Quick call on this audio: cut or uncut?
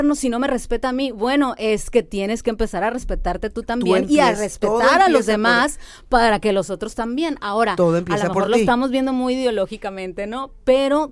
uncut